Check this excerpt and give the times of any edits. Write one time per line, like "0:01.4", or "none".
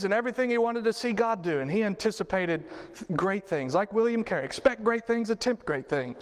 none